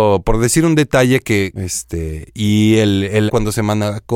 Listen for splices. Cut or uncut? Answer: cut